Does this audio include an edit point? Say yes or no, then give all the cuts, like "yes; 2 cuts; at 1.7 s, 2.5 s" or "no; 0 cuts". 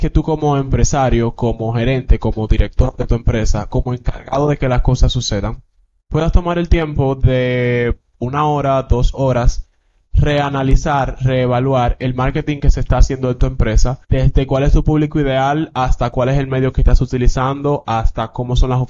yes; 1 cut; at 14.0 s